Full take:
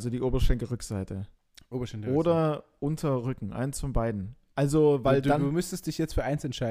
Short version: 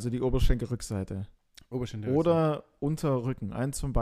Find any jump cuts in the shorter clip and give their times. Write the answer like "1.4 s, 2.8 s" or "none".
none